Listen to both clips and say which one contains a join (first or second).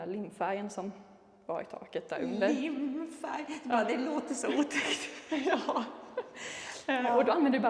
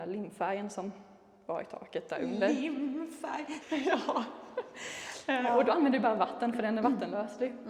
second